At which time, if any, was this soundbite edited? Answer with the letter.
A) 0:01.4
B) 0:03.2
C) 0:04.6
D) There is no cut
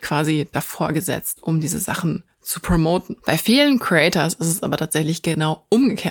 B